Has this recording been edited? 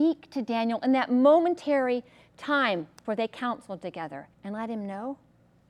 yes; 2 cuts; at 3.0 s, 4.3 s

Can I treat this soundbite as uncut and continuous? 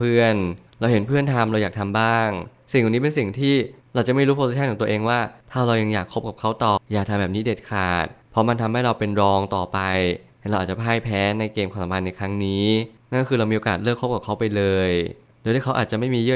no; 1 cut; at 6.8 s

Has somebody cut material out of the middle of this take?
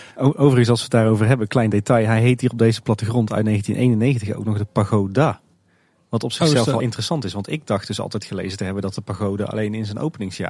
no; 0 cuts

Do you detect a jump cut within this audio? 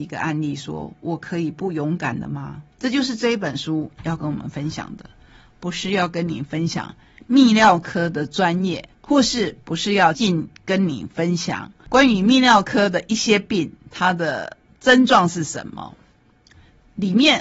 yes; 2 cuts; at 2.7 s, 10.1 s

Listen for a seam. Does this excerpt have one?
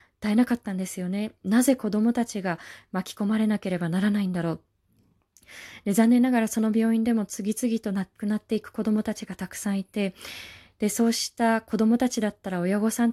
yes; 1 cut; at 1.4 s

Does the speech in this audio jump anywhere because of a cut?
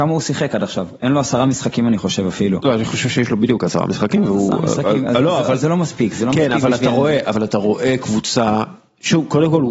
no; 0 cuts

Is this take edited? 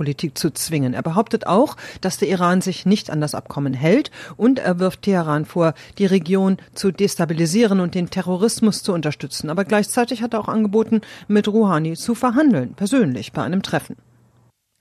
no; 0 cuts

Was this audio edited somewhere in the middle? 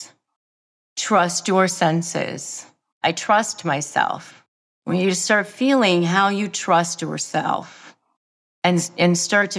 yes; 1 cut; at 3.0 s

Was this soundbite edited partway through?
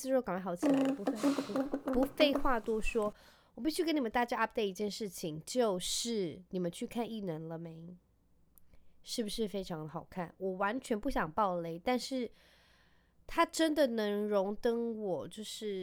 no; 0 cuts

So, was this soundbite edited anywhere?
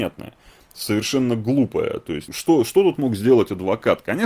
yes; 1 cut; at 2.3 s

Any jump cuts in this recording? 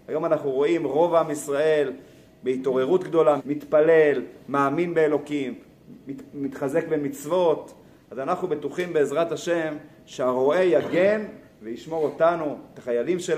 yes; 1 cut; at 3.4 s

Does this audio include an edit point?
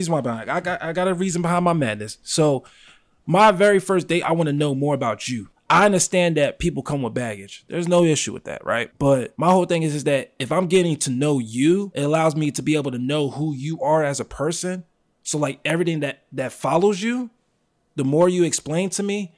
no; 0 cuts

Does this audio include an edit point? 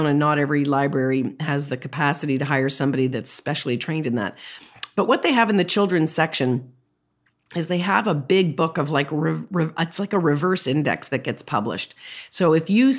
no; 0 cuts

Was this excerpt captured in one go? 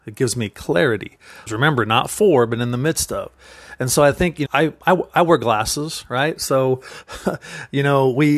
no; 2 cuts; at 1.5 s, 4.5 s

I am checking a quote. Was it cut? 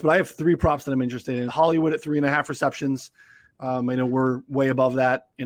yes; 1 cut; at 1.5 s

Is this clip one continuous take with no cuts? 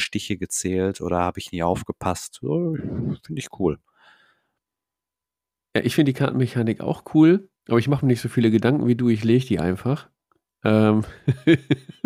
yes; 0 cuts

